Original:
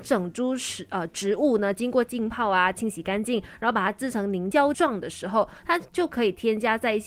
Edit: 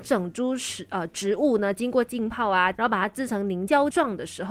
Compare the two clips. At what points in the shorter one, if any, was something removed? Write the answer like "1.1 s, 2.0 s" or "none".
2.7 s